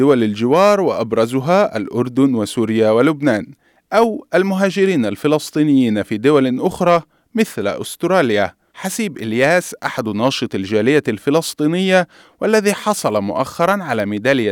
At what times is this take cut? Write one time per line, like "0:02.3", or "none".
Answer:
0:08.7